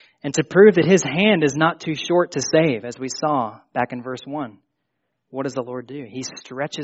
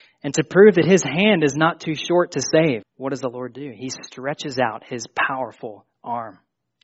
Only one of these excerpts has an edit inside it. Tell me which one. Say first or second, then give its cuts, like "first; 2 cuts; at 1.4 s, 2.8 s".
second; 1 cut; at 2.8 s